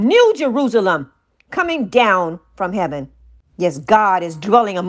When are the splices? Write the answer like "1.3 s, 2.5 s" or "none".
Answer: none